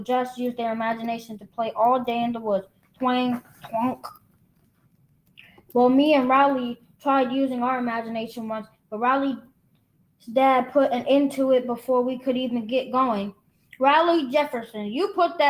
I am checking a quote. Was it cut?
no; 0 cuts

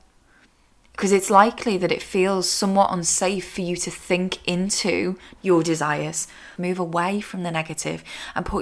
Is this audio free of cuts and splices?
no; 2 cuts; at 5.4 s, 6.6 s

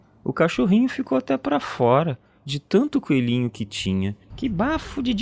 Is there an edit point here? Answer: yes; 1 cut; at 4.3 s

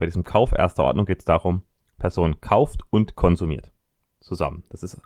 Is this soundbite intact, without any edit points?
yes; 0 cuts

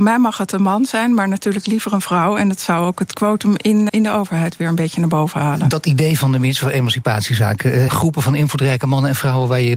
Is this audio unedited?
no; 2 cuts; at 3.9 s, 7.9 s

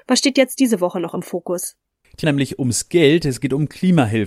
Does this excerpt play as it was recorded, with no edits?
no; 1 cut; at 2.2 s

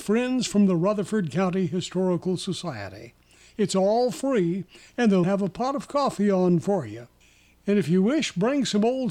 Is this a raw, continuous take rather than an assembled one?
no; 1 cut; at 5.2 s

